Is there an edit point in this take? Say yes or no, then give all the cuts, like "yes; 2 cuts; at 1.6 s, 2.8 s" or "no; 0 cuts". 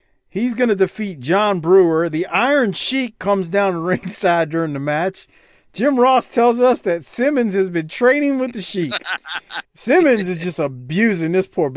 yes; 1 cut; at 9.6 s